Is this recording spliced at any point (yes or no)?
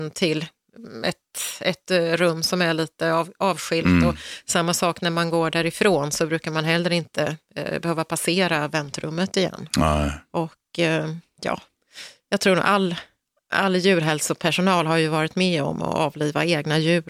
no